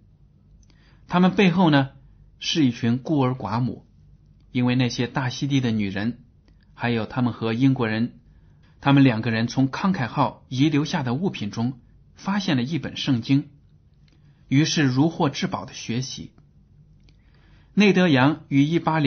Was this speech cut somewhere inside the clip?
yes; 1 cut; at 8.6 s

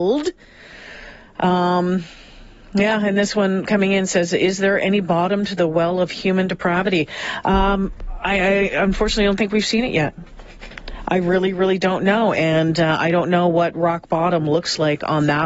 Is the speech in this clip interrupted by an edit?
no; 0 cuts

